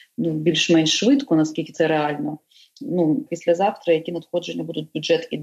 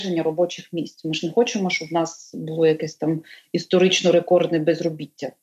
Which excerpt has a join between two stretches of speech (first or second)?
first